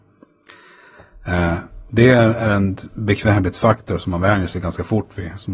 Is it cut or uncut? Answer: cut